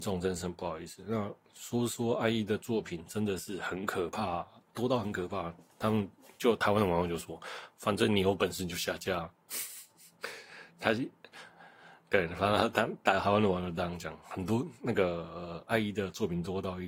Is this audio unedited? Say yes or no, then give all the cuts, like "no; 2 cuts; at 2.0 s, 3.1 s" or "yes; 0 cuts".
yes; 0 cuts